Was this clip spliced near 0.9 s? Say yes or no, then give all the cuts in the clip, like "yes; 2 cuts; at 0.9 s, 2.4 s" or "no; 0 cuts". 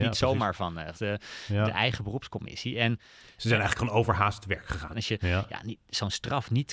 yes; 2 cuts; at 0.9 s, 4.9 s